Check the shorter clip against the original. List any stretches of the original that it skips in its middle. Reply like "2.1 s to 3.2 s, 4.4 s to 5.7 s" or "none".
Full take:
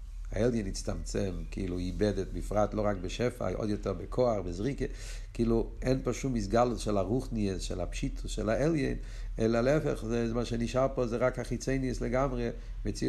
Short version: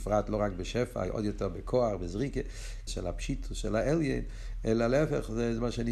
5.3 s to 7.6 s

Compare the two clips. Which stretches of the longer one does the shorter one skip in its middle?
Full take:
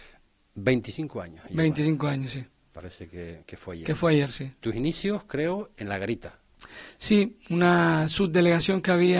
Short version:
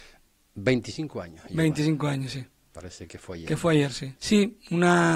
3.1 s to 3.5 s, 4.5 s to 7.0 s

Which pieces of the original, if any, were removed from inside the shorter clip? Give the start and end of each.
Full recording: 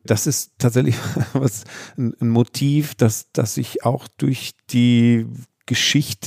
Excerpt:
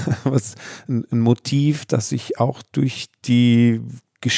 2.9 s to 3.3 s

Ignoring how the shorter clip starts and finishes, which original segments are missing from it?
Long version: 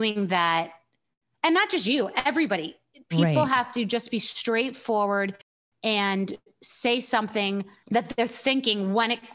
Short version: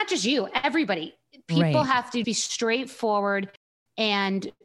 3.9 s to 4.1 s

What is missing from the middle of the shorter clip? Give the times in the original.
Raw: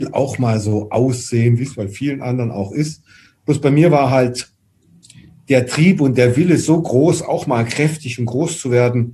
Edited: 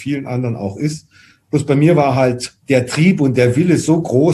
4.6 s to 5.4 s

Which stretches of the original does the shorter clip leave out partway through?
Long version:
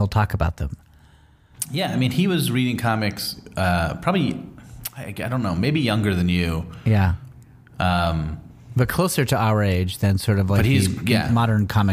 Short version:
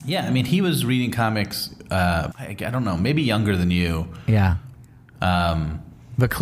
4.0 s to 4.9 s

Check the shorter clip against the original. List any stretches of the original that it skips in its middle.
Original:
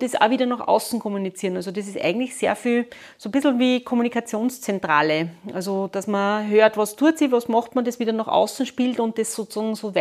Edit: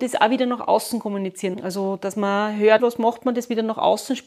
1.5 s to 5.4 s, 6.7 s to 7.3 s

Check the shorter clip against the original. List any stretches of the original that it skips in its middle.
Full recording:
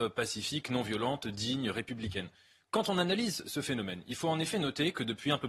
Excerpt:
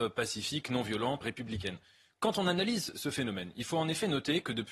1.2 s to 1.7 s

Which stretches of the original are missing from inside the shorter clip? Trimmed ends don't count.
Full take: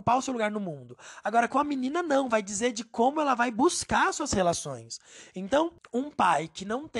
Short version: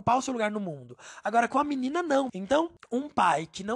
2.3 s to 5.3 s

